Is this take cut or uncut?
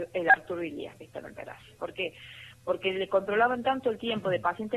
cut